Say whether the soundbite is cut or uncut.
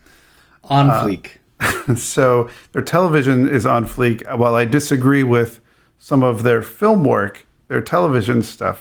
uncut